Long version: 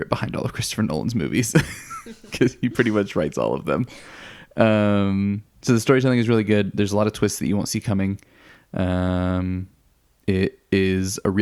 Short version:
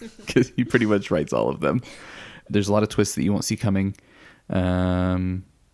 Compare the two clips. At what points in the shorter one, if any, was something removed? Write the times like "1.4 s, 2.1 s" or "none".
2.5 s